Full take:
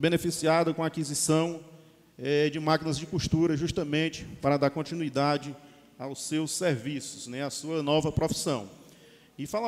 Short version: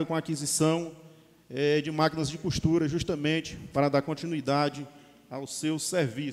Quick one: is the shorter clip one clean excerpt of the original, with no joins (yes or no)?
yes